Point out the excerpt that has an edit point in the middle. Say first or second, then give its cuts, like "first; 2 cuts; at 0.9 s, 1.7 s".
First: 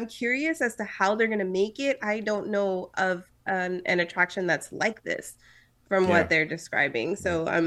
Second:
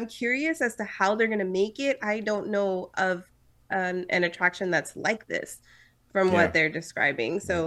first; 1 cut; at 3.4 s